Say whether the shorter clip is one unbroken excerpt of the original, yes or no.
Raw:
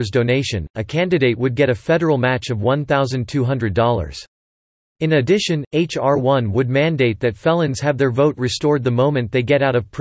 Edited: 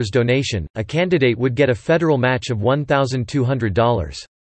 yes